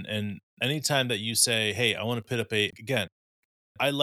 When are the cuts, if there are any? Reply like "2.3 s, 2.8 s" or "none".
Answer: 2.7 s